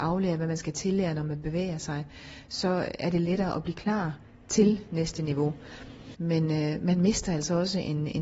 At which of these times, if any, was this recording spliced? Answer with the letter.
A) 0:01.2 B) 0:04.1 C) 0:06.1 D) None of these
C